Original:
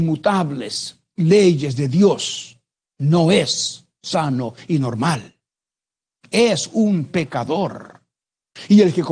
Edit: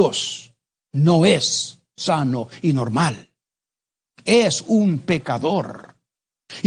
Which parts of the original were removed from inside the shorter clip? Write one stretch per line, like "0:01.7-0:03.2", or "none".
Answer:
none

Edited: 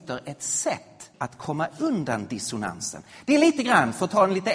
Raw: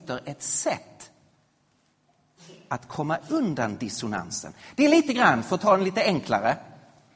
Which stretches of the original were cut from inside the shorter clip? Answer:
0:01.1-0:02.6

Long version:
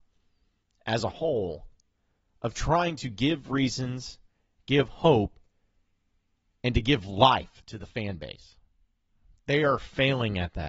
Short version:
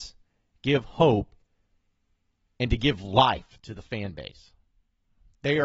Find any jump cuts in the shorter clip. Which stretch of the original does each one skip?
none

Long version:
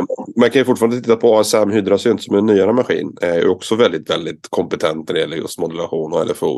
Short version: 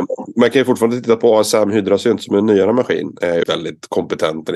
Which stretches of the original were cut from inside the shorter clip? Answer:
0:03.4-0:04.0

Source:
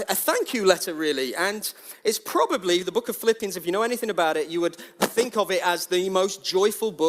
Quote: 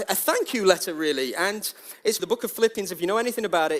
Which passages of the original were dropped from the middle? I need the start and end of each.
0:02.2-0:02.8

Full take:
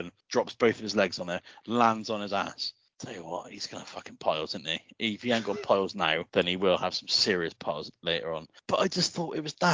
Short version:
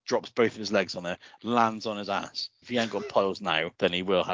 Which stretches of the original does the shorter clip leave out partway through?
0:02.9-0:05.2

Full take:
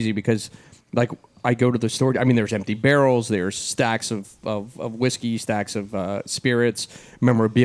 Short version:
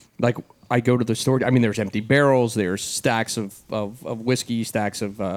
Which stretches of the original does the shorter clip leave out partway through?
none

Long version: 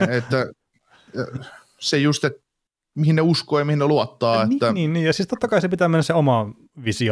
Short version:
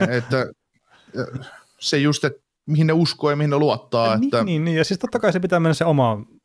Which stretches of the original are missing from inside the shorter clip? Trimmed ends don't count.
0:02.5-0:02.8

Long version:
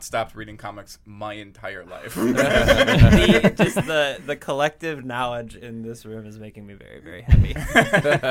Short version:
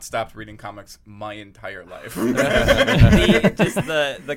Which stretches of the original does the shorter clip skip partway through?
none

